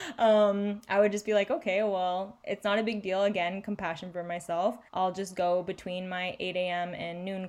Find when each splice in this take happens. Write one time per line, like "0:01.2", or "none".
0:04.9